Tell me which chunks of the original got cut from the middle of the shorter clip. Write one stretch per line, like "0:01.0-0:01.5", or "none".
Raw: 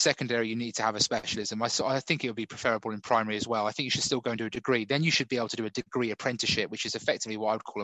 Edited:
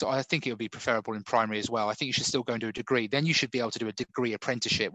none